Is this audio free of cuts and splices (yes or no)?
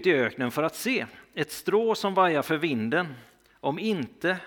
yes